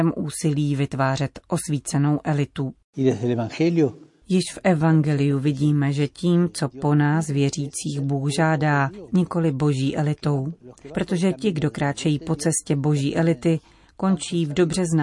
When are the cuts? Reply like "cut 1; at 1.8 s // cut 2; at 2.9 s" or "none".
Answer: cut 1; at 9.1 s